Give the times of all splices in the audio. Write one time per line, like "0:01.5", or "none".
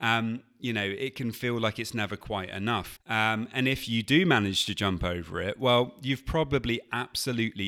0:03.0